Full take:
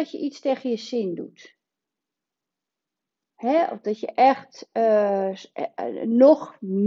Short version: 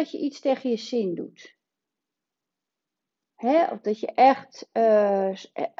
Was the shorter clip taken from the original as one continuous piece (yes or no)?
yes